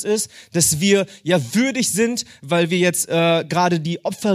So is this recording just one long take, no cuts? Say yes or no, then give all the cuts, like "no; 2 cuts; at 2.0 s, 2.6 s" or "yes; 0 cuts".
yes; 0 cuts